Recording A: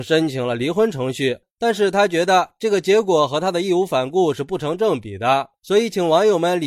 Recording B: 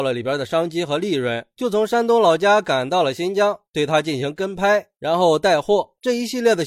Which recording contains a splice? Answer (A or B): A